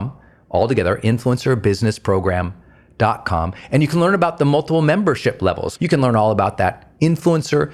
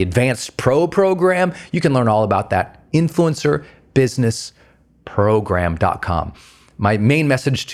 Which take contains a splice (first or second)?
first